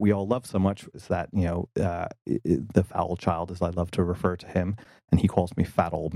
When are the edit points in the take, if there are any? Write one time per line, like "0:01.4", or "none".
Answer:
0:00.9